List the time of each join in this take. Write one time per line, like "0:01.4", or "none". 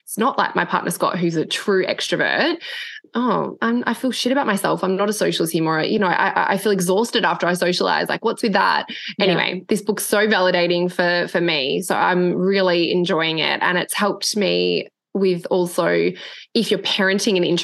none